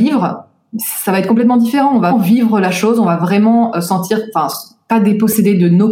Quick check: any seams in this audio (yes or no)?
yes